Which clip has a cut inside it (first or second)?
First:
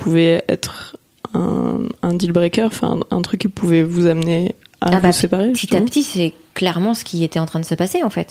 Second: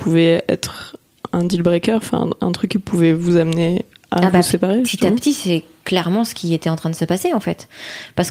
second